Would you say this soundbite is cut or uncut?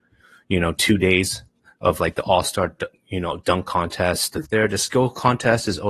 cut